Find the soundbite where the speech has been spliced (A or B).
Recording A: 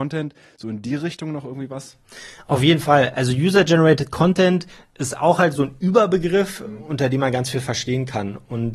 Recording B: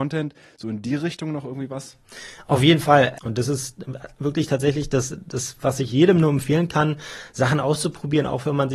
B